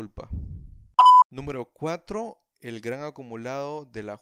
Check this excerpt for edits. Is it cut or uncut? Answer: uncut